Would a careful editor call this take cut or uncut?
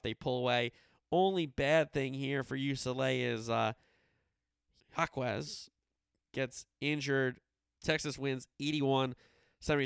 cut